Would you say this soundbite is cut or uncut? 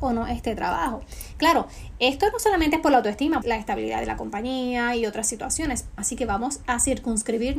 cut